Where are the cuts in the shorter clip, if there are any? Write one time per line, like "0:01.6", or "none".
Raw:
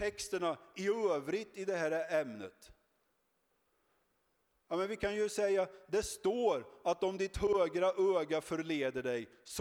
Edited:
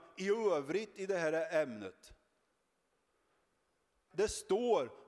0:04.1